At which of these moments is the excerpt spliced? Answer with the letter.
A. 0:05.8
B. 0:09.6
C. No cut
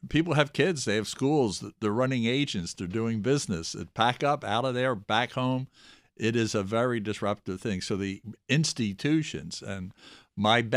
C